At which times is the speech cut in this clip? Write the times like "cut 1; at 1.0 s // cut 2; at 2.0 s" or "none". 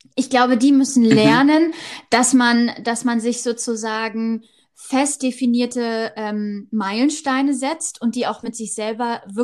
none